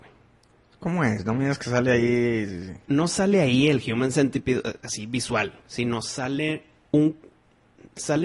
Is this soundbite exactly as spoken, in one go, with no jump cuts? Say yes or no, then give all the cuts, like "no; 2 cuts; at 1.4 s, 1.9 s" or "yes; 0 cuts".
yes; 0 cuts